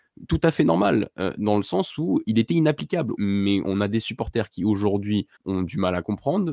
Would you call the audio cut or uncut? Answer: cut